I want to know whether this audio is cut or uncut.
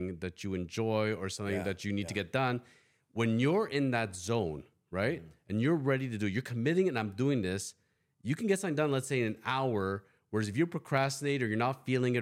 uncut